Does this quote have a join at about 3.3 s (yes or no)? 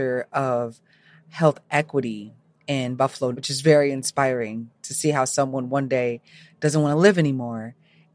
yes